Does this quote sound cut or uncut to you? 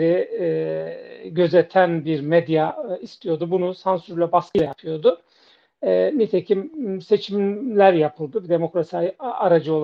uncut